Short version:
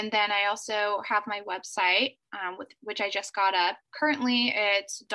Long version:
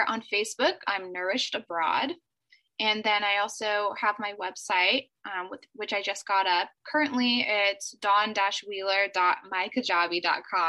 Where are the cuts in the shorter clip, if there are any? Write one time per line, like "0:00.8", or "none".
none